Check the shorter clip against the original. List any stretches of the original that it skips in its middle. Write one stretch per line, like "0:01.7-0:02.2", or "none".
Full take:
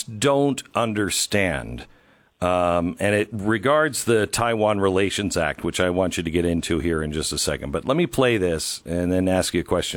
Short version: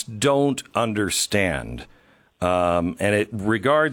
none